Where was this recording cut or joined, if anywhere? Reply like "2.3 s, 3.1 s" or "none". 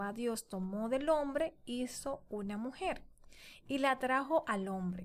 none